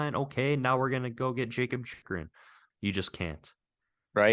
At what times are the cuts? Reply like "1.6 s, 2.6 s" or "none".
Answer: 2.7 s